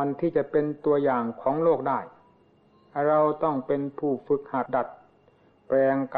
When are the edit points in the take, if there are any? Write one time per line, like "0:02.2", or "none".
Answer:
0:04.7